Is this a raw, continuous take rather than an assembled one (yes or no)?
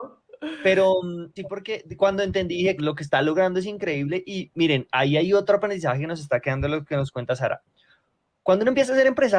no